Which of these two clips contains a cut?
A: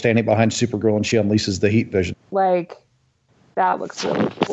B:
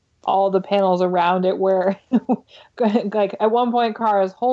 A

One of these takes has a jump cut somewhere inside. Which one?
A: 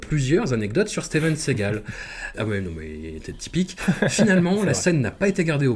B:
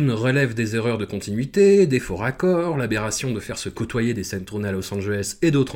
A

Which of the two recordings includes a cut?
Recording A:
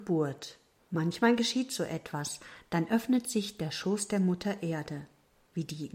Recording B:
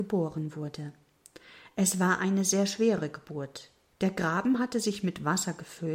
B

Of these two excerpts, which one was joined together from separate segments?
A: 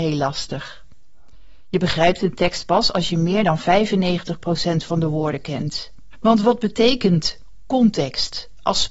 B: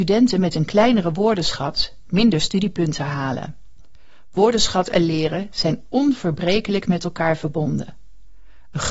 A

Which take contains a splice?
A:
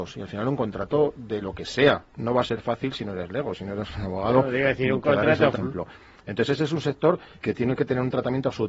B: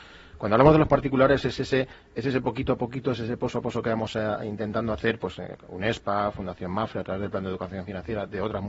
A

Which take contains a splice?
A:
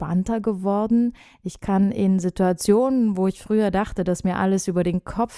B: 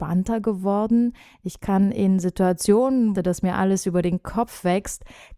B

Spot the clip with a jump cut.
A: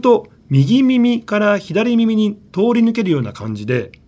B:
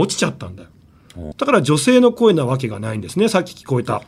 B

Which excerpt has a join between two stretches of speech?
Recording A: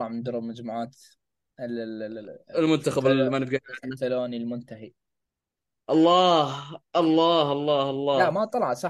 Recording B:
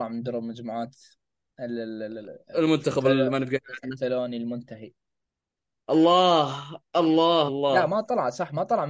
B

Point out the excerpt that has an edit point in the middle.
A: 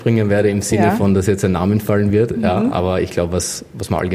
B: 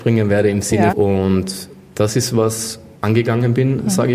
B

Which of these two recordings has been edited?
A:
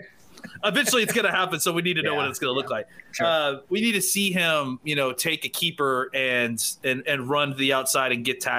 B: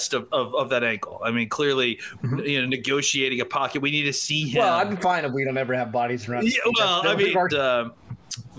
B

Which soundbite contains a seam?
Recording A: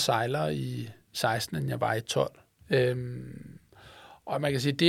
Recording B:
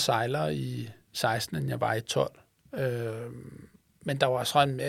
A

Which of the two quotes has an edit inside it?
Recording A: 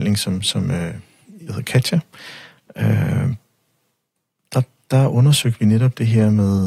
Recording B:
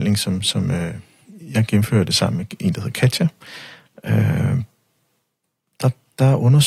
A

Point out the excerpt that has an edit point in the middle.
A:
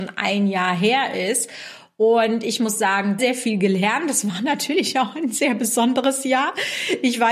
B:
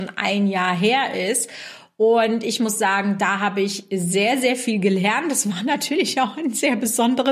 A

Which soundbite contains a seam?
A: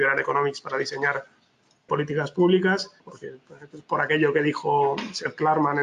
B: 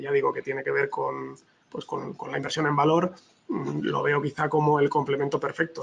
A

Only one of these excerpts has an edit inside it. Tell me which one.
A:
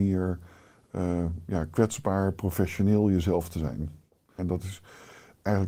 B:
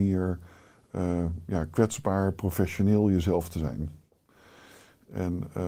A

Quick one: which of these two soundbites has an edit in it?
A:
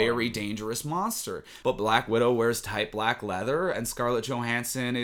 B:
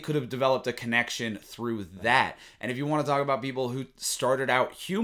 A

